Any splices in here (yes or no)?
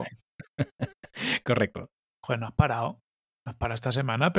yes